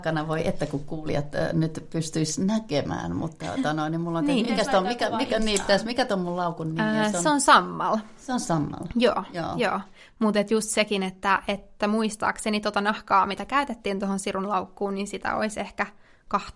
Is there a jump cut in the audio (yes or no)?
no